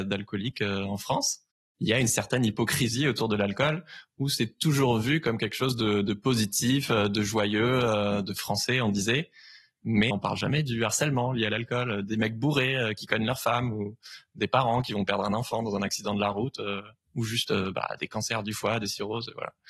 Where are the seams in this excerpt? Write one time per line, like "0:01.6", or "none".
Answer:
0:10.1

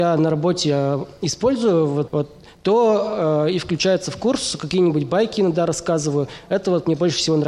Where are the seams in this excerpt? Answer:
0:02.1

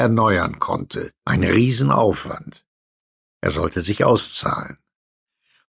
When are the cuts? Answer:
0:01.2

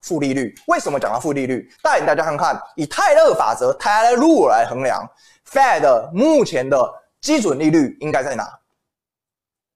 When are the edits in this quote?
none

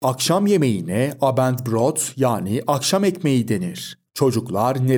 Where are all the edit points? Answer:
0:04.1

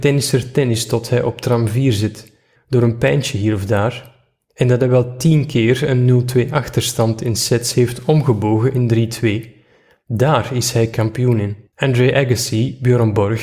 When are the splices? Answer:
0:02.6
0:11.7

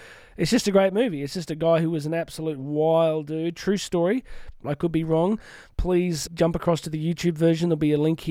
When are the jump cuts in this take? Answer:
0:04.6
0:06.3

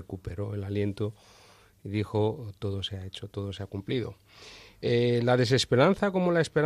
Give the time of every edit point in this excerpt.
none

